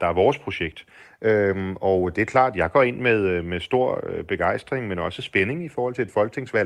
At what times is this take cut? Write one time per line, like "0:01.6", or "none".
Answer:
none